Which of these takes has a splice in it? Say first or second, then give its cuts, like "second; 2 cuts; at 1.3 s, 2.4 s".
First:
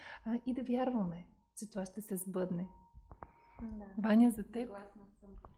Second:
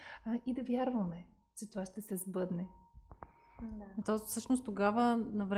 second; 1 cut; at 4.0 s